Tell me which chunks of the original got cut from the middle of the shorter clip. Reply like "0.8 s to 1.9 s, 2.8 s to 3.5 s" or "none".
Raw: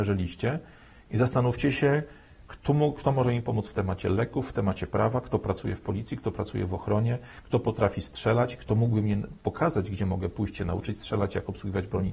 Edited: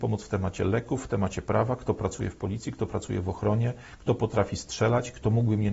none